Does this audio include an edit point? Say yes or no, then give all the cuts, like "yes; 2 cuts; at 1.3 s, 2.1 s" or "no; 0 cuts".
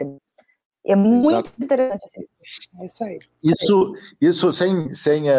no; 0 cuts